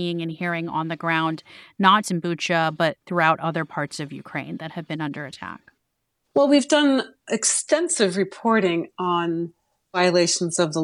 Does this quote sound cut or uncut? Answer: cut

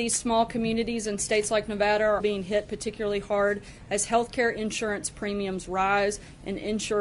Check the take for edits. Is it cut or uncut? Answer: cut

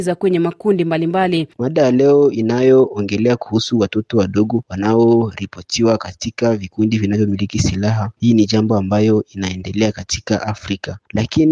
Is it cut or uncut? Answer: cut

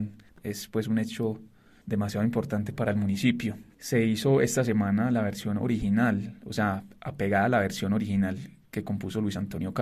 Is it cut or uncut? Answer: uncut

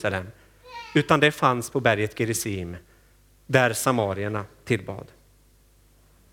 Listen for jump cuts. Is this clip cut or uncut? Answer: uncut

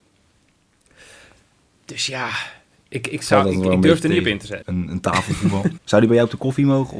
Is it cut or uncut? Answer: cut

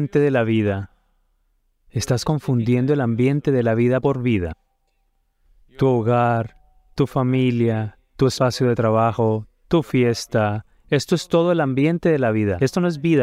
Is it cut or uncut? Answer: uncut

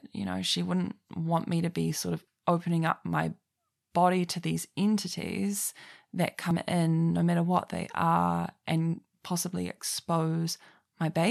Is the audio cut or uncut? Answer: uncut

